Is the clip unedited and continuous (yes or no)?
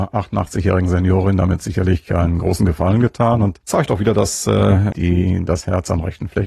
no